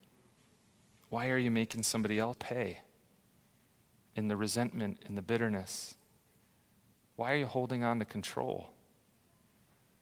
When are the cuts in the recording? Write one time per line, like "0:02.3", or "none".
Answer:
0:02.3